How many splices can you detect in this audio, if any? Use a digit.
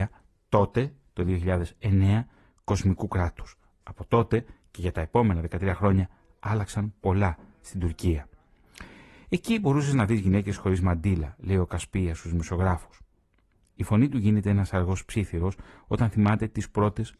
0